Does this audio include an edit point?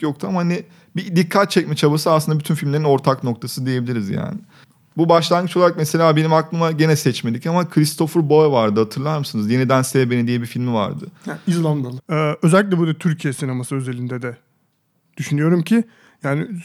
yes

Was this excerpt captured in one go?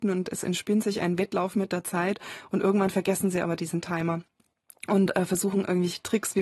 yes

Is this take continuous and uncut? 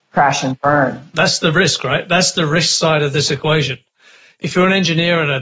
yes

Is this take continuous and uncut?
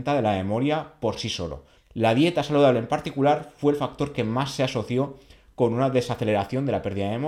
no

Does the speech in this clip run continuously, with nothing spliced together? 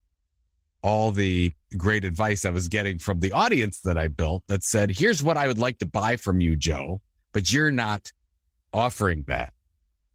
yes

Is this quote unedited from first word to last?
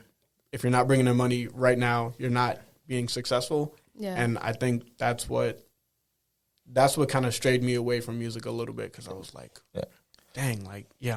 yes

